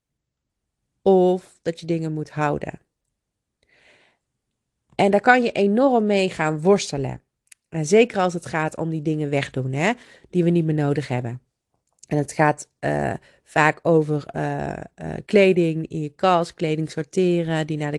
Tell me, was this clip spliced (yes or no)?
no